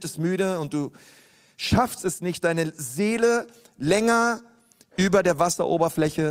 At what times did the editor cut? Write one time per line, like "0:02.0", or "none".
none